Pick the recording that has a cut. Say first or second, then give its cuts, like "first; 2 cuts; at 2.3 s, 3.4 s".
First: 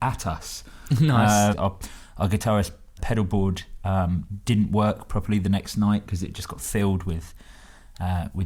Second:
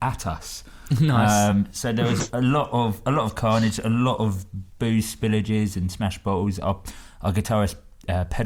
first; 2 cuts; at 1.5 s, 3.0 s